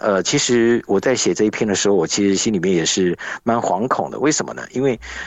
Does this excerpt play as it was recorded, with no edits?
yes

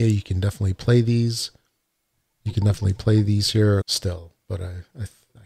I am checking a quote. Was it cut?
yes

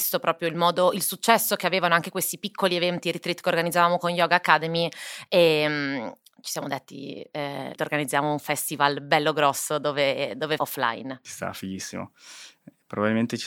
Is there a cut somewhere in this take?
yes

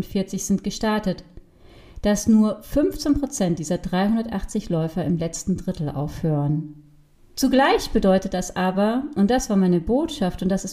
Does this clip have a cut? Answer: yes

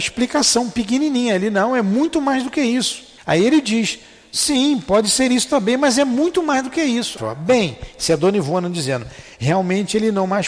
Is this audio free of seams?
no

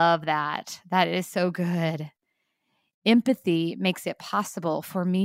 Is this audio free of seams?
yes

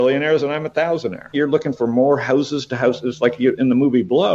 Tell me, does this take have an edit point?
yes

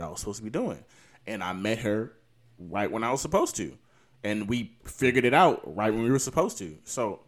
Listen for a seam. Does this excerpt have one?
no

